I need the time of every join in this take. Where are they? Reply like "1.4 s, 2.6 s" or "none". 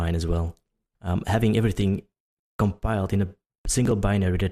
0.9 s